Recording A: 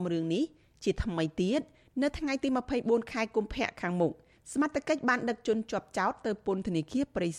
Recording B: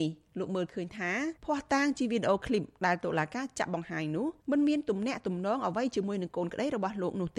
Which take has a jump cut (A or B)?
B